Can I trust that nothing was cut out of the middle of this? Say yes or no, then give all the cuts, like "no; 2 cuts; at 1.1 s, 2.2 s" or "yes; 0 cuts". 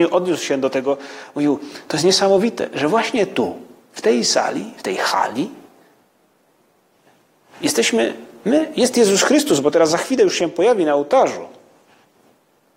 yes; 0 cuts